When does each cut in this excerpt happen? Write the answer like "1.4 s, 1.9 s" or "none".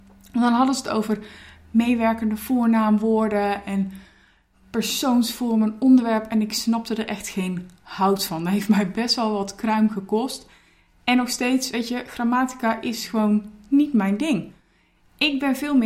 none